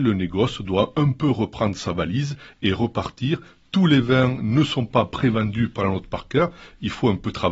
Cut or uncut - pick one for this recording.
uncut